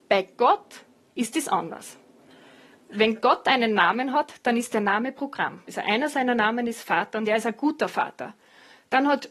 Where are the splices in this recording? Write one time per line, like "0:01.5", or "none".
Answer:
0:05.7